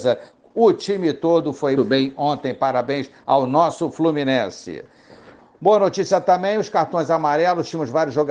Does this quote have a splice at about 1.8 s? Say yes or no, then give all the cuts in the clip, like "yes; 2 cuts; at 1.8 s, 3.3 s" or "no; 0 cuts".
yes; 1 cut; at 1.8 s